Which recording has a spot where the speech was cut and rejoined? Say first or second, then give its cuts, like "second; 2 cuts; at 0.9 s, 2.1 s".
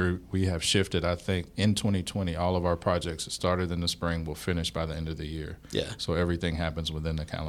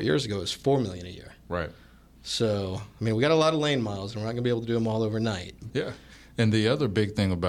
second; 1 cut; at 5.7 s